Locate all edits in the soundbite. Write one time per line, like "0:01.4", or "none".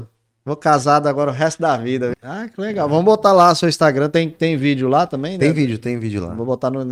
0:02.1